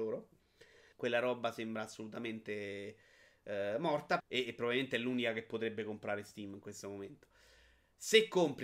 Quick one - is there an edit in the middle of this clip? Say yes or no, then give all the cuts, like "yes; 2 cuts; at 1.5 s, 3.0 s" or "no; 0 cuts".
yes; 2 cuts; at 0.9 s, 4.2 s